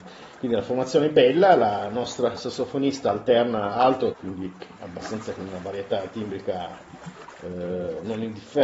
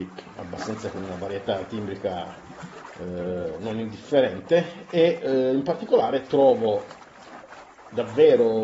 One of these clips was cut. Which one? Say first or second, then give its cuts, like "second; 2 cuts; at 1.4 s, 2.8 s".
first; 1 cut; at 4.1 s